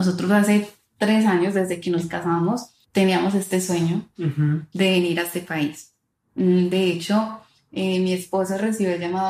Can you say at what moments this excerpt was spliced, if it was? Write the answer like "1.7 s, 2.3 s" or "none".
2.8 s